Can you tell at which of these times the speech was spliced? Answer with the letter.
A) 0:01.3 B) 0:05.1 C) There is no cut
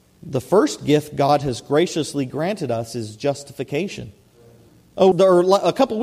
B